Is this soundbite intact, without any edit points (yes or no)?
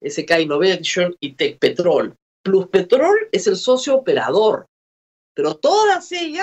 no